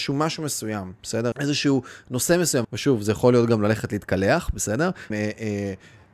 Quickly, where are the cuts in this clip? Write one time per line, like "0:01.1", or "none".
0:01.3
0:02.6
0:05.1